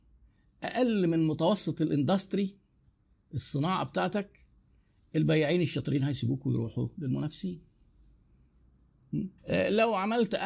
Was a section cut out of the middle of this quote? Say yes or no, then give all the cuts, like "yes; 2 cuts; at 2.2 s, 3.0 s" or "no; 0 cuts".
yes; 1 cut; at 9.4 s